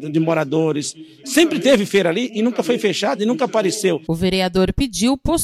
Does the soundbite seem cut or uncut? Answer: cut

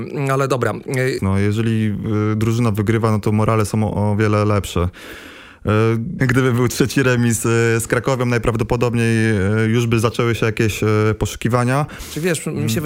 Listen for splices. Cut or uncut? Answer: cut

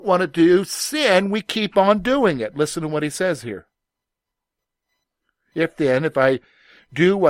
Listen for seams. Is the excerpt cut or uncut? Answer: uncut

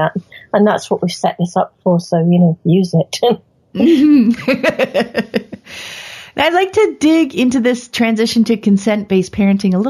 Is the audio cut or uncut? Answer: uncut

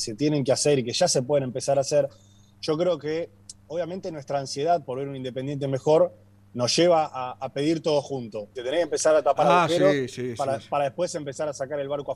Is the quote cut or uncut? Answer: cut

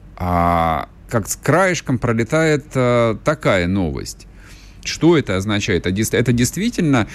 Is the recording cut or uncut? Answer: cut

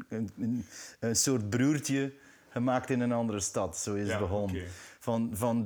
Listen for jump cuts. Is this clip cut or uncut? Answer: uncut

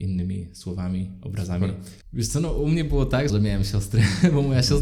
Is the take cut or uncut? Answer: cut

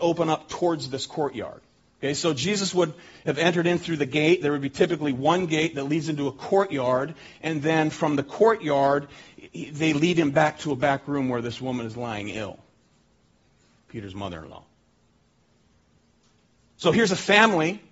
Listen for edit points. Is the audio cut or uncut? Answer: uncut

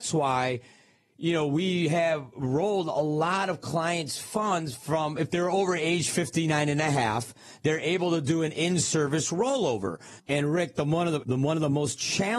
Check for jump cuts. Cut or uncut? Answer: cut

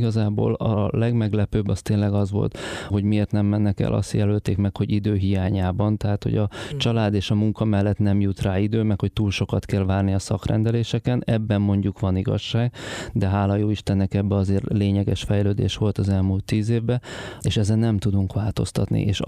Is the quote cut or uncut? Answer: cut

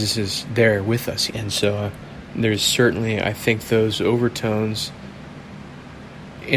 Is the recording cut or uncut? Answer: cut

